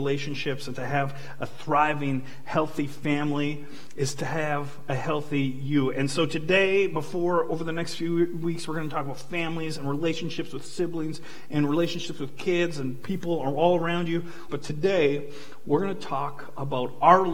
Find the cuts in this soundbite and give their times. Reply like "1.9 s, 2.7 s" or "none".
14.5 s